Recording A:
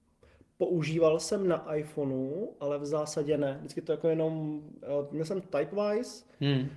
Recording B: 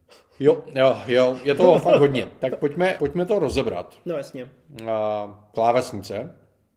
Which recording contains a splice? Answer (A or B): B